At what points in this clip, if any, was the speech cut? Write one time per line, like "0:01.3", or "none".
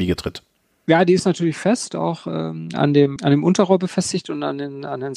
0:03.2